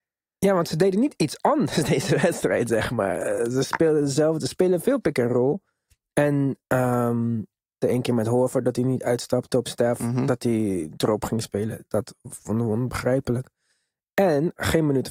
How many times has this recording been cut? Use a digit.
1